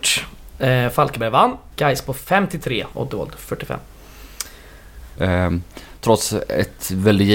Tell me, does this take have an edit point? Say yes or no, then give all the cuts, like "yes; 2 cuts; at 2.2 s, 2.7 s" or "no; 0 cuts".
yes; 3 cuts; at 1.7 s, 2.9 s, 5.2 s